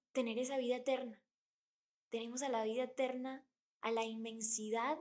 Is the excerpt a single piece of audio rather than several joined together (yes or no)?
yes